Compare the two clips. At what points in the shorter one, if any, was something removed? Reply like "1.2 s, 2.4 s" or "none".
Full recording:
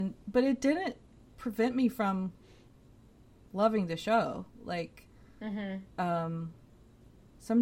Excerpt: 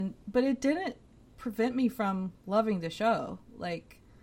2.4 s